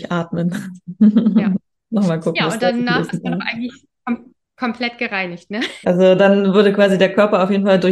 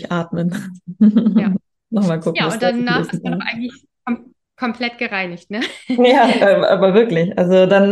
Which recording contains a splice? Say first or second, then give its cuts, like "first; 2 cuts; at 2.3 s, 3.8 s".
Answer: first; 1 cut; at 5.8 s